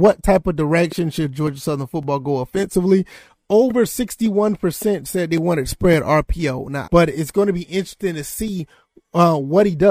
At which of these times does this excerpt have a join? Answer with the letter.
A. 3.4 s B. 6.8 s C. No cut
B